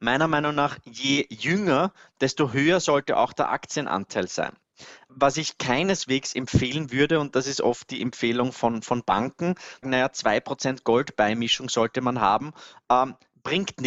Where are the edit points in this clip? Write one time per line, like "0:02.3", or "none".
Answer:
0:05.1
0:08.5
0:09.8

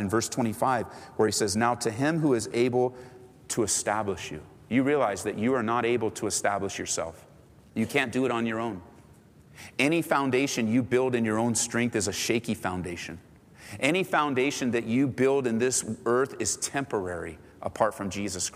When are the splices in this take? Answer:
none

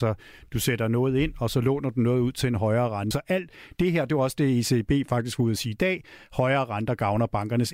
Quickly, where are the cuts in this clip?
0:03.1

